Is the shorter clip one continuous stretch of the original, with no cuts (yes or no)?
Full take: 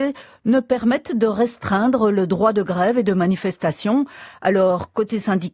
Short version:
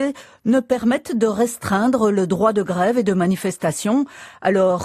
yes